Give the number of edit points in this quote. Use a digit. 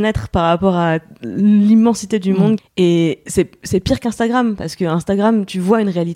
1